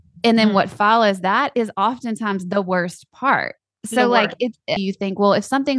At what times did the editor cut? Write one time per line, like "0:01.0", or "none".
0:04.8